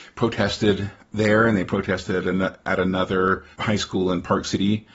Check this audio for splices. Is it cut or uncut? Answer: cut